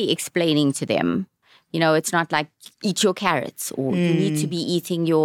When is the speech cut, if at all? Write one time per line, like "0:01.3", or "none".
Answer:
none